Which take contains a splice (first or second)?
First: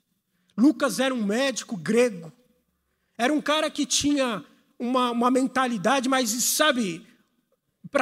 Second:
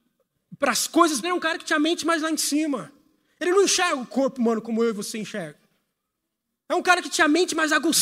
second